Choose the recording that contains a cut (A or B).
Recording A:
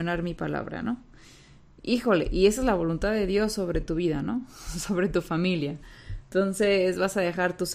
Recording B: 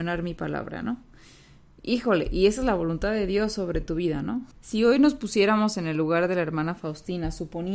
B